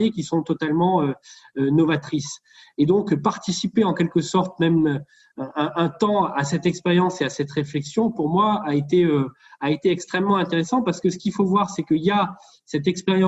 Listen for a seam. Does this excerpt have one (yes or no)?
no